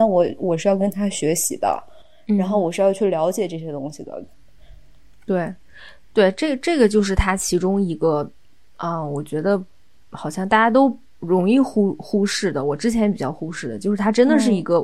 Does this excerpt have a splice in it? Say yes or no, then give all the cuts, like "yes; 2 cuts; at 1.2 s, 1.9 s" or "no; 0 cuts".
no; 0 cuts